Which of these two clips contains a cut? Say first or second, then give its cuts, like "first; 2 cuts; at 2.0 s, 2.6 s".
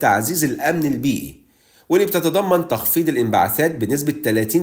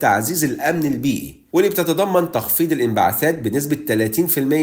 second; 1 cut; at 1.5 s